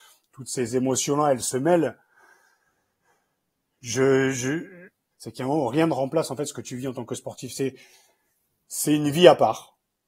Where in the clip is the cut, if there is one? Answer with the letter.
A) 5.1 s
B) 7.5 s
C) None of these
A